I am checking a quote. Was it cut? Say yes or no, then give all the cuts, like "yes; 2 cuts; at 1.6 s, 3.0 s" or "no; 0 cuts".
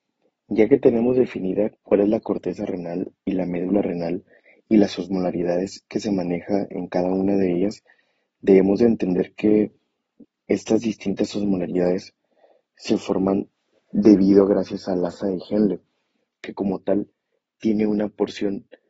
no; 0 cuts